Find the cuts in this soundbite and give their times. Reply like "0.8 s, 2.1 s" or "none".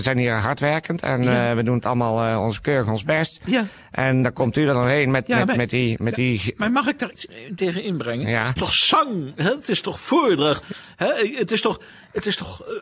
7.1 s, 8.6 s